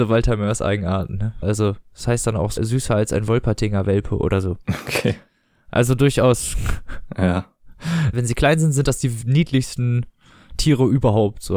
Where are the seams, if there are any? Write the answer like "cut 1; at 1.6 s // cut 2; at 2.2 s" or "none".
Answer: cut 1; at 1.4 s // cut 2; at 2.6 s // cut 3; at 8.1 s